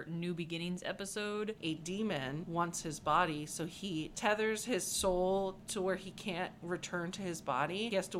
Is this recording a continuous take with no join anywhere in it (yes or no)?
no